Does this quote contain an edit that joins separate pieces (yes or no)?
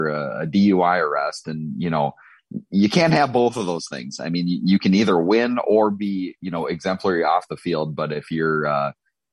no